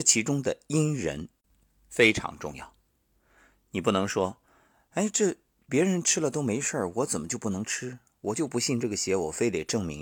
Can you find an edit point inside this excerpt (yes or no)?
no